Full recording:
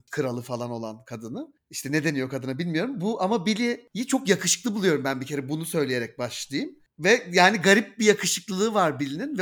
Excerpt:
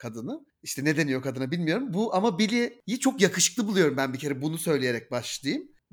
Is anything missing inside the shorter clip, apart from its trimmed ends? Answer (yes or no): no